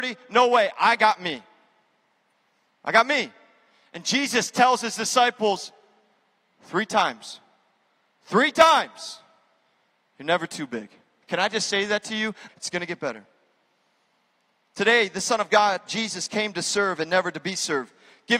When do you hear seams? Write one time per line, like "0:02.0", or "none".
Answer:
0:11.2
0:12.5